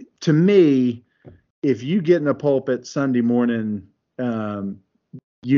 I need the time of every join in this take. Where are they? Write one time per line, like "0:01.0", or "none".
none